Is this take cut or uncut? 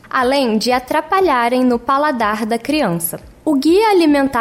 uncut